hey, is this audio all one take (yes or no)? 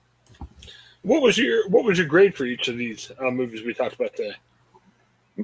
yes